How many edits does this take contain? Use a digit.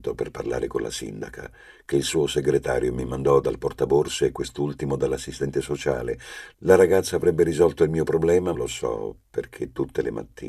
1